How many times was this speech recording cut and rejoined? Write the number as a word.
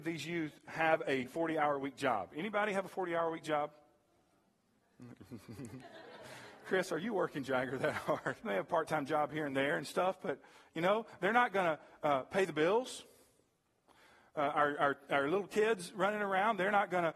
one